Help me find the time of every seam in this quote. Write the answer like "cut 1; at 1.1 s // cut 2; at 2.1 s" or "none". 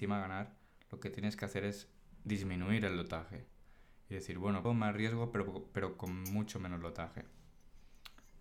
cut 1; at 4.6 s